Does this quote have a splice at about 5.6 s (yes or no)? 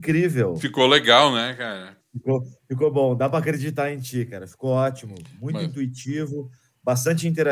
no